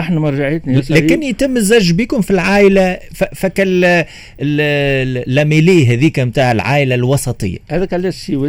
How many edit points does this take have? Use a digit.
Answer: 0